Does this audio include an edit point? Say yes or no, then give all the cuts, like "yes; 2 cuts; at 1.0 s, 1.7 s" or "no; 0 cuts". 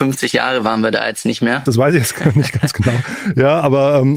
yes; 1 cut; at 1.7 s